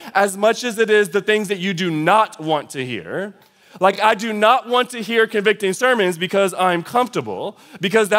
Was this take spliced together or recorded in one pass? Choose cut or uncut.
uncut